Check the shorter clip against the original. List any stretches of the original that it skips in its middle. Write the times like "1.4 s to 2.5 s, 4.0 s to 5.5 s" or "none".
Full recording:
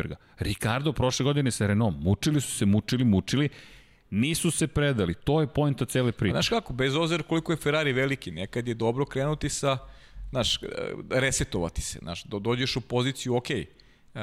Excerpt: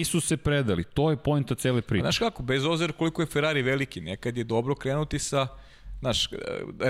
none